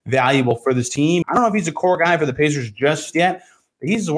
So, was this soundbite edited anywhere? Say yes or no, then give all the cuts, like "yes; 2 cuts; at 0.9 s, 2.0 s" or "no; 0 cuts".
yes; 1 cut; at 1.2 s